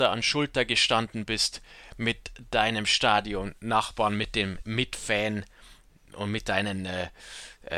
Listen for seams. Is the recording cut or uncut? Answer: uncut